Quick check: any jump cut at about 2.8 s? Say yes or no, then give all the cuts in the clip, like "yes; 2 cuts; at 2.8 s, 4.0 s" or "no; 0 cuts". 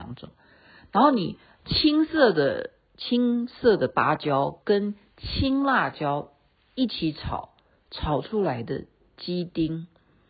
no; 0 cuts